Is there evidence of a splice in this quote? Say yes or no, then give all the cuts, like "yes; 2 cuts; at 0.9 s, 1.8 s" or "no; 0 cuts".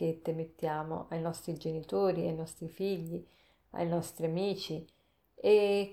no; 0 cuts